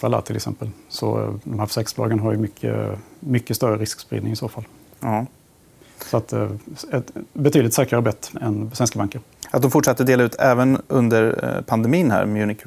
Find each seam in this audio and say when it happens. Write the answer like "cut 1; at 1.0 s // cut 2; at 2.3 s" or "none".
cut 1; at 8.4 s